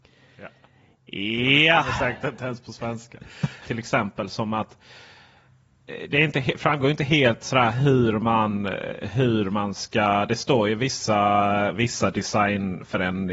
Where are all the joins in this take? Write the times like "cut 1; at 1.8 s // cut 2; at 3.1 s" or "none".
cut 1; at 3.6 s